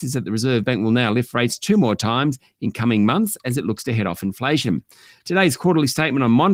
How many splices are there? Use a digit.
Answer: 0